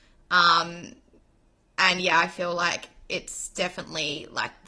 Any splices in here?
no; 0 cuts

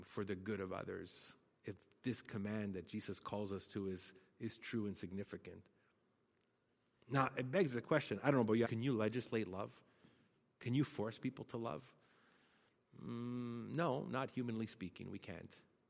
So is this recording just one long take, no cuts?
no; 1 cut; at 8.6 s

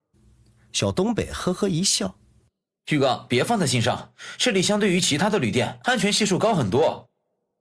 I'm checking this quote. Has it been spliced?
no; 0 cuts

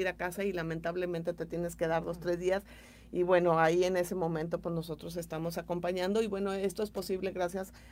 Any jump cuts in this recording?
no; 0 cuts

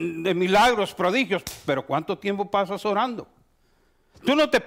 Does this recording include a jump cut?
no; 0 cuts

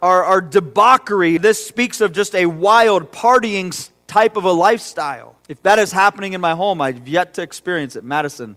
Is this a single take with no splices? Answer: no; 2 cuts; at 1.4 s, 5.4 s

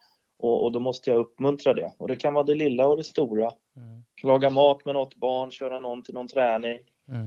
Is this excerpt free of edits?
yes; 0 cuts

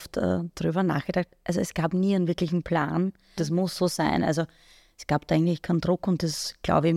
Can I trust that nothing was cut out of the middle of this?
no; 1 cut; at 3.4 s

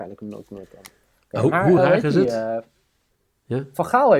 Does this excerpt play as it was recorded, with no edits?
yes; 0 cuts

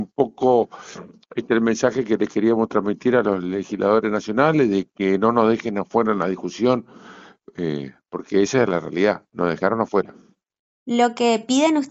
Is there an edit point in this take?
no; 0 cuts

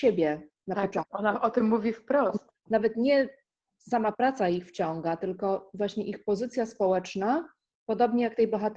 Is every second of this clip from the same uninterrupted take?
no; 1 cut; at 2.6 s

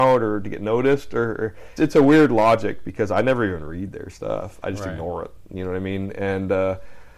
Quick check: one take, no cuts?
no; 1 cut; at 1.8 s

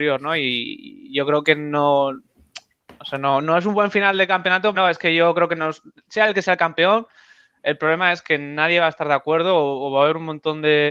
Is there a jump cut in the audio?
yes; 1 cut; at 4.7 s

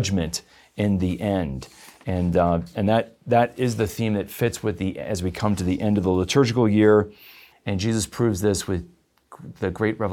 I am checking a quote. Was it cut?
yes; 1 cut; at 7.5 s

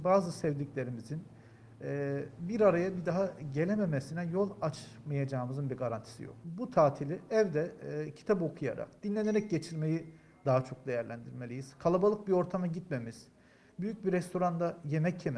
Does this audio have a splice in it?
no; 0 cuts

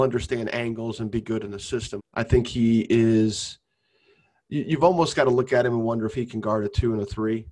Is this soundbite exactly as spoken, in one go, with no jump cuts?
no; 1 cut; at 2.0 s

